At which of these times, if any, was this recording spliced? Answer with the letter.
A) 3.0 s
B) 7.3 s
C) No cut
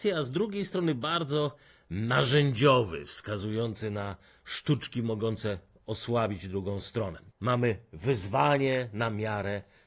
B